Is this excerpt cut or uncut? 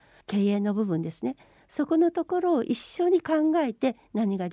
uncut